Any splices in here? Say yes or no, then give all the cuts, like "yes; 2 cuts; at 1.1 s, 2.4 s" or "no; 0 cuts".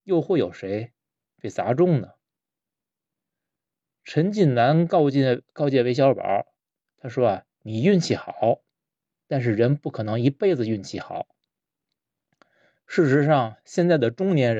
no; 0 cuts